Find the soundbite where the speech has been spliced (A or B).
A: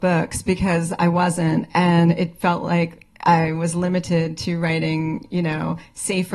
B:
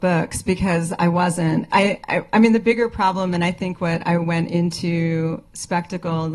B